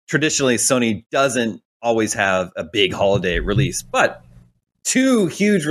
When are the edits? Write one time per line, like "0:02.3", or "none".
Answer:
none